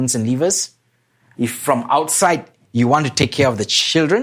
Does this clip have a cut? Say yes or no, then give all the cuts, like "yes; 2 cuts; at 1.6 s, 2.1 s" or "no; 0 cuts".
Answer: yes; 1 cut; at 1.3 s